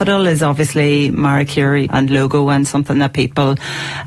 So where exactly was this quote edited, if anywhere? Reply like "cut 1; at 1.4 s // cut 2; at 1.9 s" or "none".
cut 1; at 1.9 s